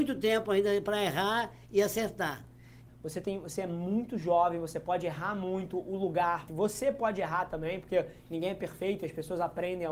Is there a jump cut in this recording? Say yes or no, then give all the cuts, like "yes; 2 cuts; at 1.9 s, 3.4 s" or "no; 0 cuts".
yes; 2 cuts; at 2.9 s, 6.5 s